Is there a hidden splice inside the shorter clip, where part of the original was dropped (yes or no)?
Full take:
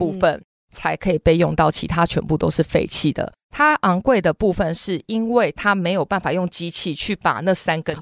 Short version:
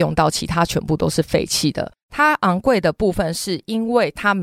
no